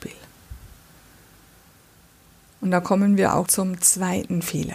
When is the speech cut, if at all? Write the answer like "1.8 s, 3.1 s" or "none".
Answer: 3.5 s

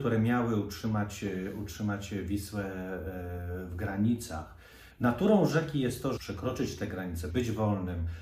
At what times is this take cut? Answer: 4.9 s, 6.2 s, 7.3 s

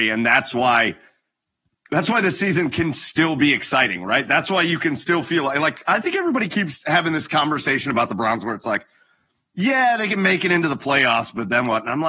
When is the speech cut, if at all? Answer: none

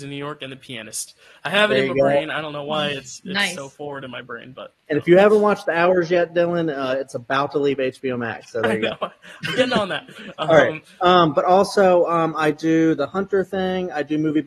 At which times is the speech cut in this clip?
none

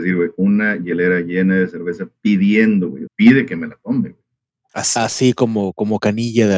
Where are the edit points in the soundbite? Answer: 3.1 s, 4.7 s

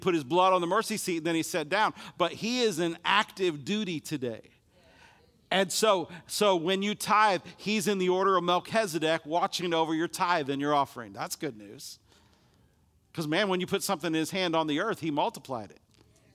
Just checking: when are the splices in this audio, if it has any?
none

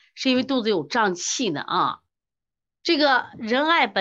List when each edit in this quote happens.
none

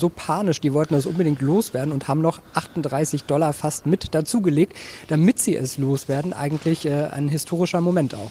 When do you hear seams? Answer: none

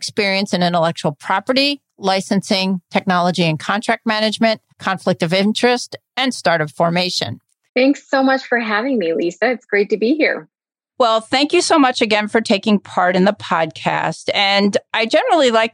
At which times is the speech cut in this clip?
4.7 s, 7.7 s

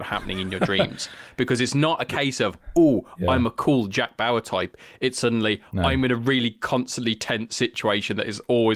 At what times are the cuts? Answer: none

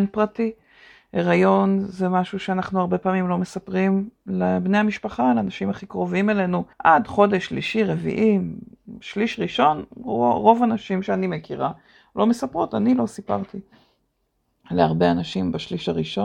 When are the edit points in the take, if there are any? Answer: 6.7 s

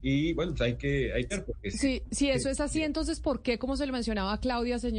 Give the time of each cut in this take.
1.3 s

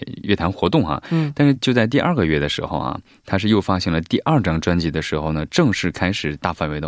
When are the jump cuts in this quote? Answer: 1.6 s

